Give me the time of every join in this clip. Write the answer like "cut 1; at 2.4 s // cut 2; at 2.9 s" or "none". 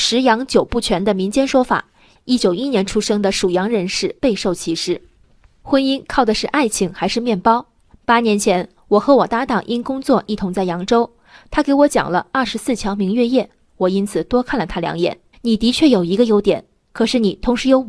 cut 1; at 2.4 s // cut 2; at 15.3 s